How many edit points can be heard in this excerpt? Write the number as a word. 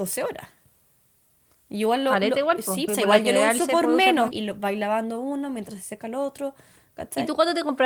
two